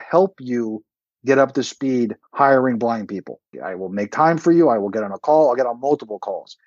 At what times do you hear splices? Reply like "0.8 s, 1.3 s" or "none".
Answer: 3.5 s